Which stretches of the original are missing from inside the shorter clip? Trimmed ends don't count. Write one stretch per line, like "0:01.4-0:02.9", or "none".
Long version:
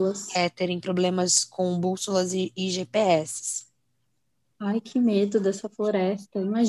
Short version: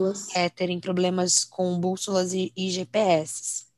none